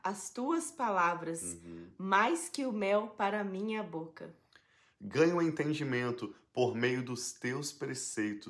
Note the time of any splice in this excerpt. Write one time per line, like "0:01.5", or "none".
none